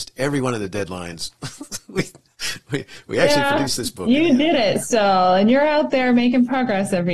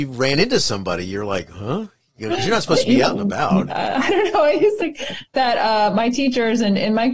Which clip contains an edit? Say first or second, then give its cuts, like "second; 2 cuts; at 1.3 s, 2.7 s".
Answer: second; 2 cuts; at 3.7 s, 4.8 s